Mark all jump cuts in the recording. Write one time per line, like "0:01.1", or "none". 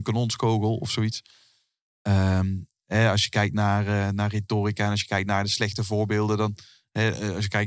none